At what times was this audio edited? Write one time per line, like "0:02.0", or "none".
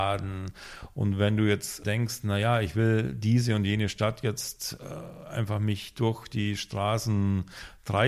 none